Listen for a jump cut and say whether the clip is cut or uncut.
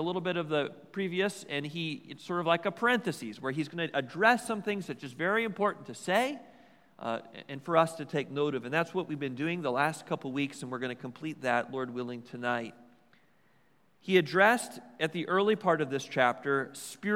uncut